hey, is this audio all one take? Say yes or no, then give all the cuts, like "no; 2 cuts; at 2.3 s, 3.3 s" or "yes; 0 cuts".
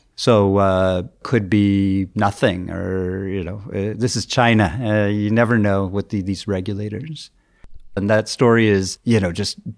no; 1 cut; at 8.0 s